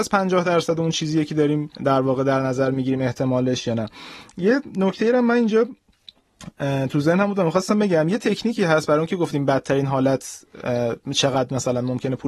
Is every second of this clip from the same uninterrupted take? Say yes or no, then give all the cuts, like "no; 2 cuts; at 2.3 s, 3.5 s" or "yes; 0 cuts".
no; 1 cut; at 1.7 s